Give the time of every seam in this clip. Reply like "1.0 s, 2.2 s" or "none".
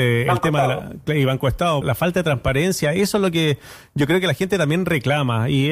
1.8 s